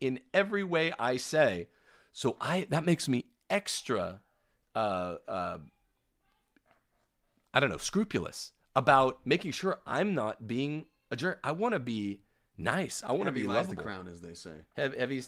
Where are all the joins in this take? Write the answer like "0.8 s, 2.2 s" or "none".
none